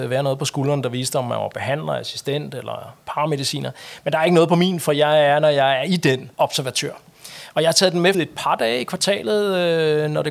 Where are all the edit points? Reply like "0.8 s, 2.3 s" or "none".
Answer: 6.3 s, 8.1 s